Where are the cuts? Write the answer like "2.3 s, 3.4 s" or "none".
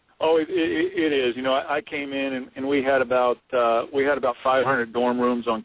none